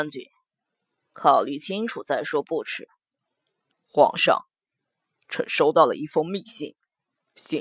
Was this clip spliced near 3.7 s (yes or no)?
yes